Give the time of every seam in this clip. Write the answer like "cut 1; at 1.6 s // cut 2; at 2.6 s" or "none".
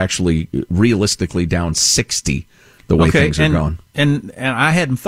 none